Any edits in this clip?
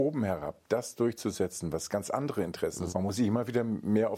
yes; 1 cut; at 2.9 s

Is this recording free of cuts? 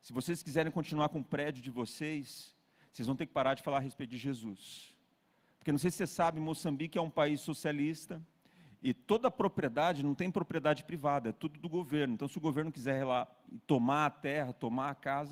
yes; 0 cuts

